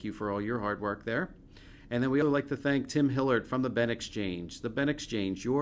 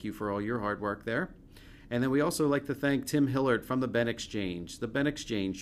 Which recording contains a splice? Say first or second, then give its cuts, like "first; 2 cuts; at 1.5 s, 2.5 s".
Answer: first; 1 cut; at 2.2 s